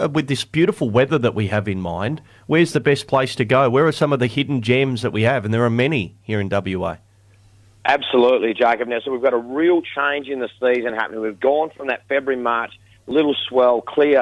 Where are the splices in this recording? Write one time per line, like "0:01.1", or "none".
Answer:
none